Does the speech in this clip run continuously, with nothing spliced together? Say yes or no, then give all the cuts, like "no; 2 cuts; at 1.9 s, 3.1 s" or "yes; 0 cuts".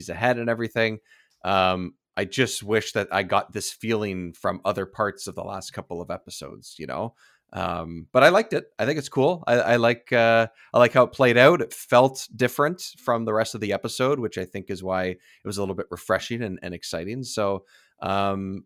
yes; 0 cuts